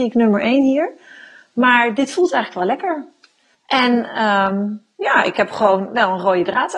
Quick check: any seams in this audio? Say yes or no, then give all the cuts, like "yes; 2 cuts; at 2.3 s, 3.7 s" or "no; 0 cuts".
no; 0 cuts